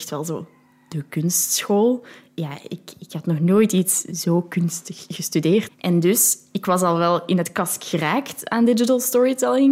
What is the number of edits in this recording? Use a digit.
1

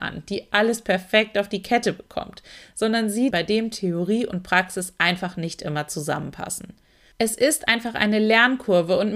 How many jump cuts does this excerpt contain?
2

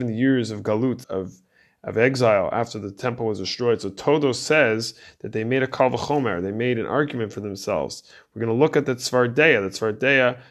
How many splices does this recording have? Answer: 1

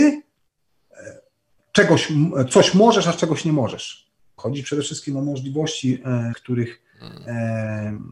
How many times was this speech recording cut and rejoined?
2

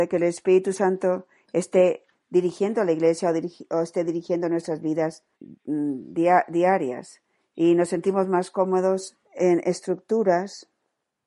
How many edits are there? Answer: 2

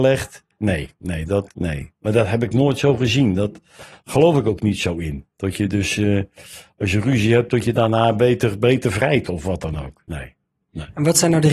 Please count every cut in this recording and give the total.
1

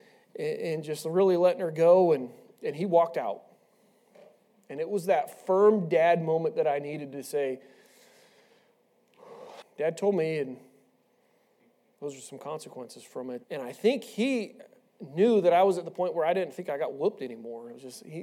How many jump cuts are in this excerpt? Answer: 2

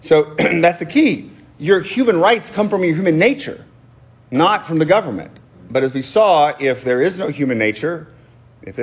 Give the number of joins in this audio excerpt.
0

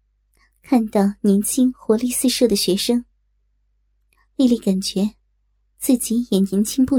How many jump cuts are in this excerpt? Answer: 0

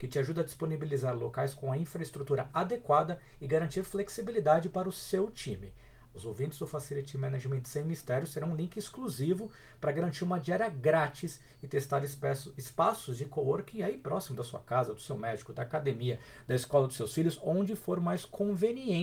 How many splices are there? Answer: 1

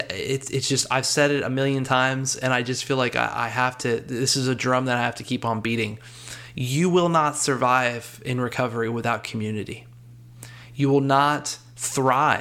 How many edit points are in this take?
0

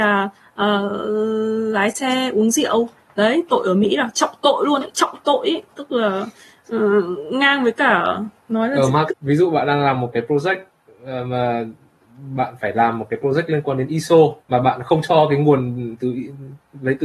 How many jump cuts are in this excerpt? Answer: 2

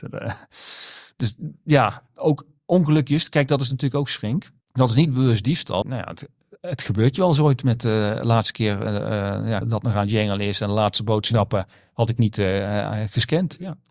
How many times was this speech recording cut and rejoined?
3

